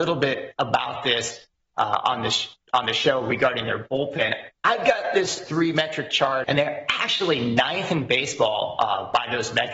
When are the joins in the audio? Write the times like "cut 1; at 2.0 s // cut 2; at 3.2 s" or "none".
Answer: cut 1; at 4.6 s // cut 2; at 6.4 s